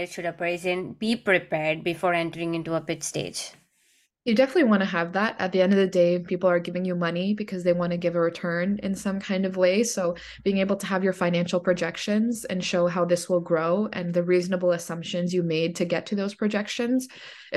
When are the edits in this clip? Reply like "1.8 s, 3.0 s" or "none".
none

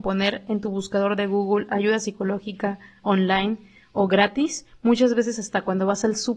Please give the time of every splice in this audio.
none

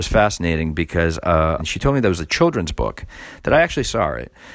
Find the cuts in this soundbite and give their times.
1.6 s

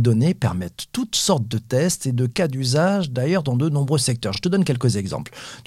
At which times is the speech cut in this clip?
none

